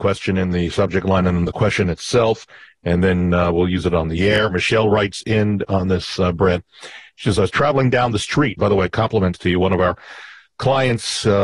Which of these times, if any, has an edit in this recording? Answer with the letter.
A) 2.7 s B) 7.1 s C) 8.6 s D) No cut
C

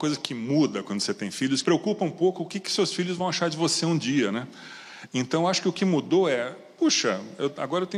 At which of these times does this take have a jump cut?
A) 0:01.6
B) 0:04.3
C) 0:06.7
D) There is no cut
A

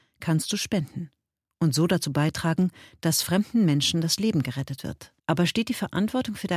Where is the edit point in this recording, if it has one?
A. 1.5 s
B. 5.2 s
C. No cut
B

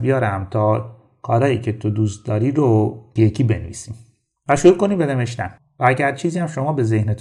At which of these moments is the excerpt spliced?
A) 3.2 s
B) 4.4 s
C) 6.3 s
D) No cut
A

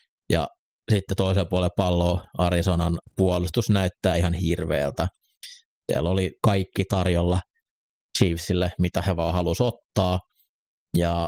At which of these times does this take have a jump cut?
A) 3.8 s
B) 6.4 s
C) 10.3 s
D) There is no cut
B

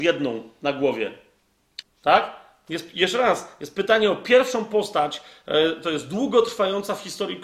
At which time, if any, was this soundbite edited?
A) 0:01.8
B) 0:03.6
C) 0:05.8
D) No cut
A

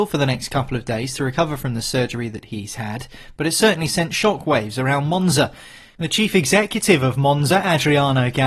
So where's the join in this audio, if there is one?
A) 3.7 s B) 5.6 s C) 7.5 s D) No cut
D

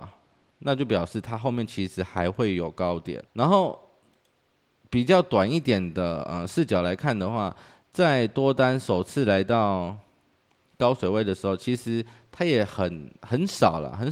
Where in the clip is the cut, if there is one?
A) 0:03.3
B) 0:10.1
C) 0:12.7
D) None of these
A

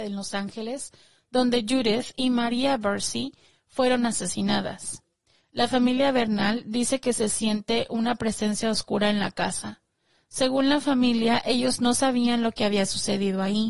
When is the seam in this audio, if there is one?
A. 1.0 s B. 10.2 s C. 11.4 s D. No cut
D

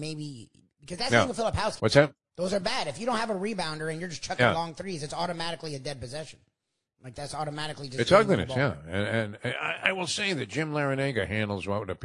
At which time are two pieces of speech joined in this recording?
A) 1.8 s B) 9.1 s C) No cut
A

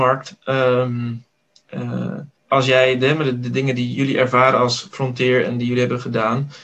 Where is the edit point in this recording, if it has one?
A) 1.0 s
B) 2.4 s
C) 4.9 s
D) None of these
B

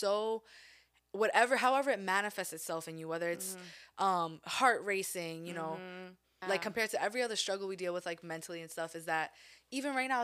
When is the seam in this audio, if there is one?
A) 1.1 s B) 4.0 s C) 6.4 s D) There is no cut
C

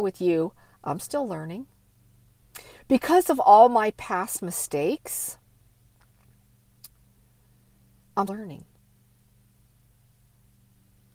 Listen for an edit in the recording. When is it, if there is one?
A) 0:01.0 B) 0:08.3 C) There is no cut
B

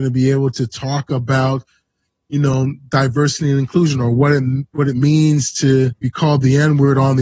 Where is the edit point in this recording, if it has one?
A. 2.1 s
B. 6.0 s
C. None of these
B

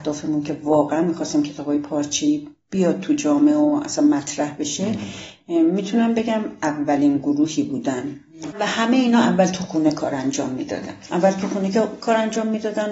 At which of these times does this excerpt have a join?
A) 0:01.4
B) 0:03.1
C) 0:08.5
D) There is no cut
C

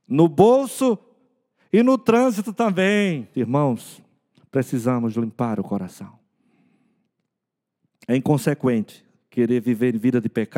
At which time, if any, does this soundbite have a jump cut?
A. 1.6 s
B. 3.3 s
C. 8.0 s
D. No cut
B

